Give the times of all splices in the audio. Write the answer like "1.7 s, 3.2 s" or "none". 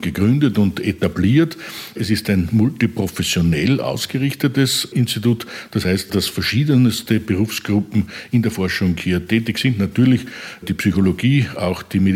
none